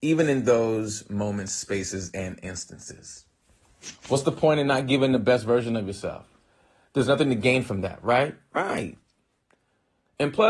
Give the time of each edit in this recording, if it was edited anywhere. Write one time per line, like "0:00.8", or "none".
none